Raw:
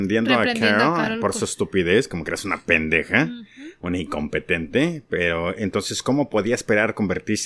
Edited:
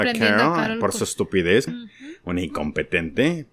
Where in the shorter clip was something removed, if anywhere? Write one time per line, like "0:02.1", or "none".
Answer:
0:01.7